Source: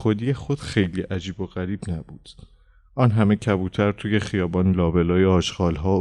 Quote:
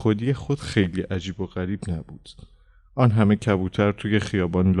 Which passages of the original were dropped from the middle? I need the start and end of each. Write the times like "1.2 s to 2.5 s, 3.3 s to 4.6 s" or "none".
none